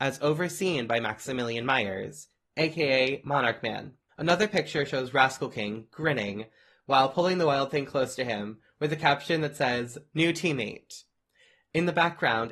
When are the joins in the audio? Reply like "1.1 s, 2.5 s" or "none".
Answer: 4.1 s